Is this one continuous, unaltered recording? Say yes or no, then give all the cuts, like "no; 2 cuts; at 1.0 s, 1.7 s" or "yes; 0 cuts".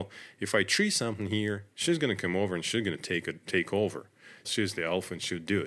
no; 1 cut; at 4.4 s